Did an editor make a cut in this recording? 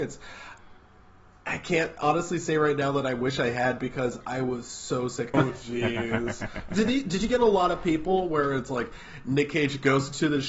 yes; 1 cut; at 5.3 s

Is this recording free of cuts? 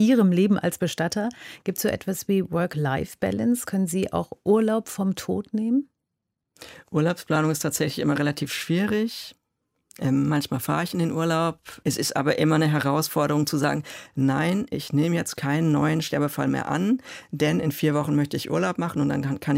yes; 0 cuts

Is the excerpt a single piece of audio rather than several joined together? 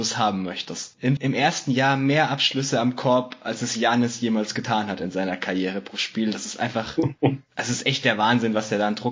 no; 1 cut; at 1.2 s

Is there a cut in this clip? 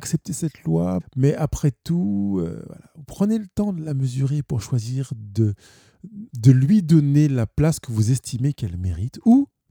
yes; 2 cuts; at 1.0 s, 6.3 s

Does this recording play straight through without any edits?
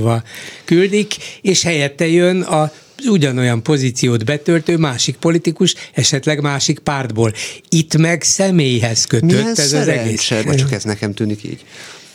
no; 1 cut; at 10.4 s

